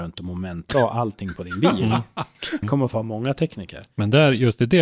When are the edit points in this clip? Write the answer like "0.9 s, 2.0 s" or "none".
2.6 s

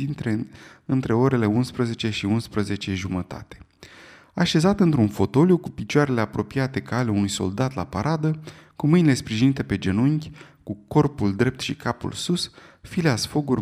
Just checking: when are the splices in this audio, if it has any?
none

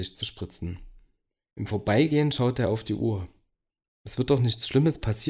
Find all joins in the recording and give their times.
3.8 s

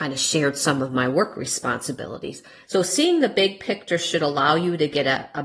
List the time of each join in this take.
2.6 s

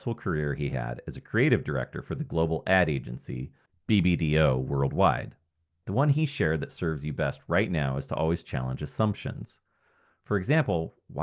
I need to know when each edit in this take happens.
none

